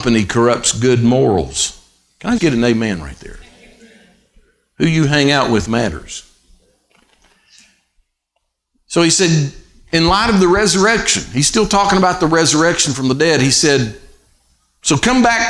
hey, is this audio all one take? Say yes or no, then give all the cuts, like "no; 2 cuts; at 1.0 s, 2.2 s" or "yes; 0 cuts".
no; 1 cut; at 2.4 s